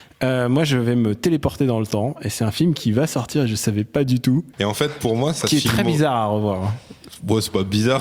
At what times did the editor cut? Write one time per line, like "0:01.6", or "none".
0:04.5